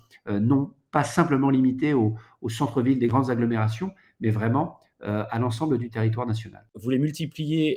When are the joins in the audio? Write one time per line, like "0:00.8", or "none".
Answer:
0:06.7